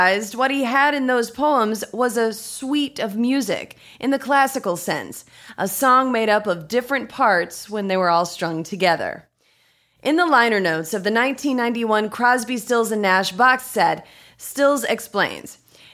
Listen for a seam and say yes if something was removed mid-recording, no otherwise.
no